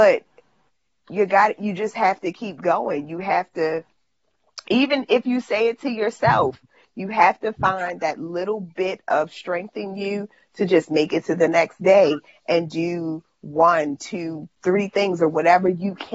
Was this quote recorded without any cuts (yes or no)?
no